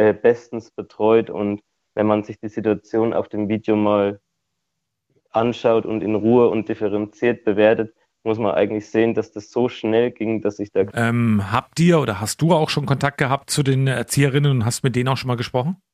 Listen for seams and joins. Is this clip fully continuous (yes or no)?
no